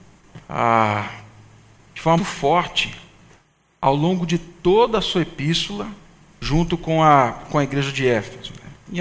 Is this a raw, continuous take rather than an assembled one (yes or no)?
no